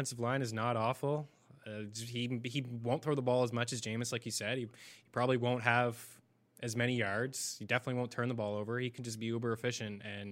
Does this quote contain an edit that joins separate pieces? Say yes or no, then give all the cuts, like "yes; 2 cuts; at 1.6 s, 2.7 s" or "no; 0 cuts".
no; 0 cuts